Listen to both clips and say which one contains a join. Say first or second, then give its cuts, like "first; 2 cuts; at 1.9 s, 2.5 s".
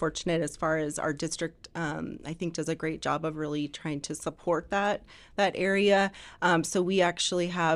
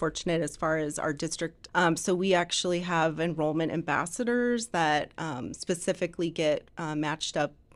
second; 1 cut; at 1.7 s